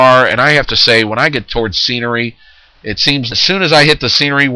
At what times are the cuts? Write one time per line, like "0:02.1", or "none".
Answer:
0:03.3